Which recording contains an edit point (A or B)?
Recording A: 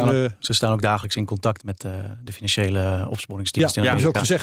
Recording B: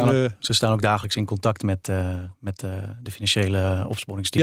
A